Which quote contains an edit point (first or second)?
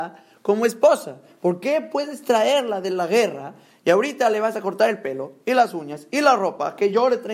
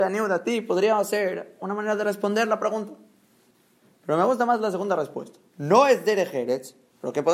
second